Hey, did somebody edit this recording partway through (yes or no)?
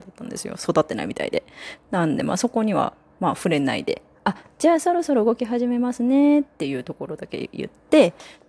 no